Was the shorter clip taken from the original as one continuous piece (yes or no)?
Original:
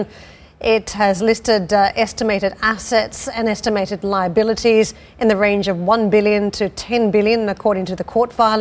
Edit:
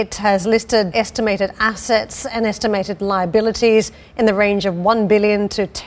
no